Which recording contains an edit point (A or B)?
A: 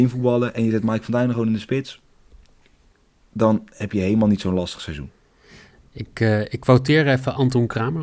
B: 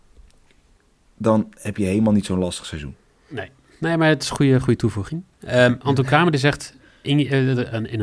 B